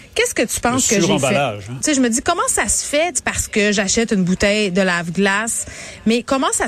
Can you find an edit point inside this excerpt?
yes; 2 cuts; at 1.8 s, 3.2 s

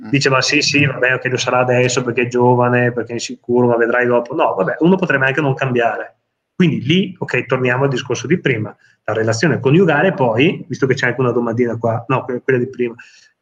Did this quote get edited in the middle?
no; 0 cuts

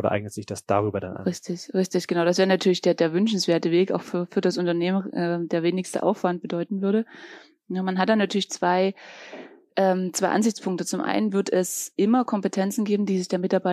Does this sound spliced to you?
no; 0 cuts

